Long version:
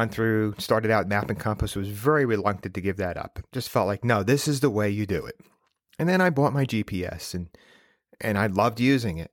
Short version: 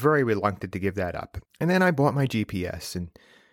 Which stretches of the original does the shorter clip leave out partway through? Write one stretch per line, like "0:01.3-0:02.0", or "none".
0:03.5-0:05.8

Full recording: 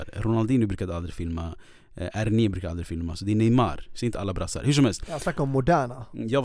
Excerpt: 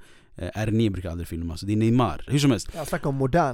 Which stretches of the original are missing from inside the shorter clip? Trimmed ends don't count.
0:03.9-0:04.6

